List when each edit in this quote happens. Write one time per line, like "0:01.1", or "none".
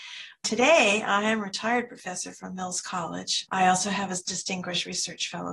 0:03.4